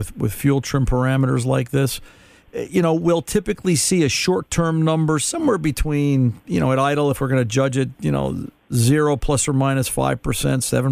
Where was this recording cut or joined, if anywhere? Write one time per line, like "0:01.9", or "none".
none